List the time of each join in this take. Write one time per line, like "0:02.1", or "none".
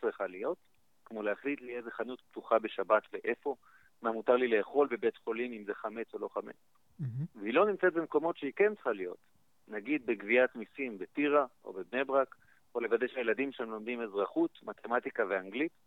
none

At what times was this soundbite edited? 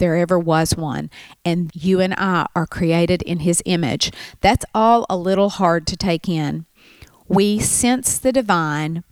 0:01.7

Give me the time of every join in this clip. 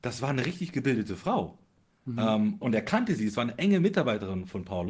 0:02.6

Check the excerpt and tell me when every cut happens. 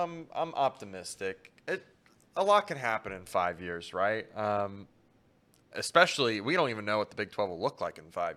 none

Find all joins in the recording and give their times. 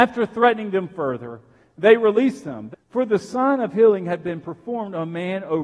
0:02.7

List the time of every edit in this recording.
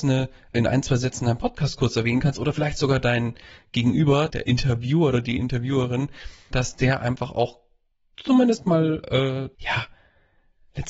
0:04.3
0:06.5
0:09.5

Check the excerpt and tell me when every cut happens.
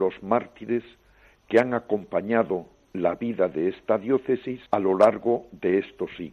0:04.7

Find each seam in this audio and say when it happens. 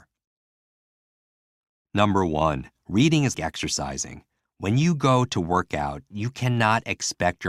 0:03.3

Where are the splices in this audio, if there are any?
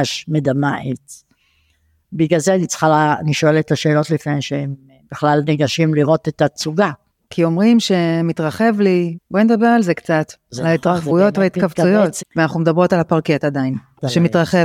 0:09.1
0:12.2

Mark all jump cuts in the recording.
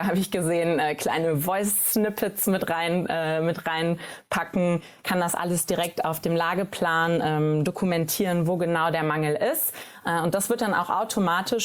none

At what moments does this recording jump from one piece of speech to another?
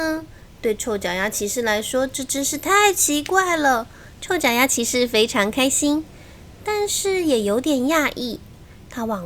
0:04.1

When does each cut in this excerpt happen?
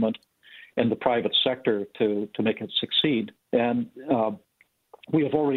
0:03.4

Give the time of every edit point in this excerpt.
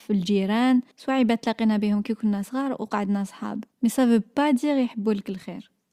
0:00.9
0:03.7

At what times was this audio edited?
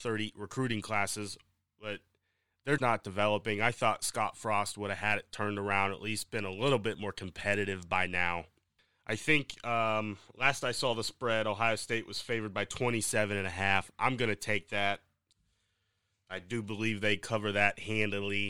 0:02.8

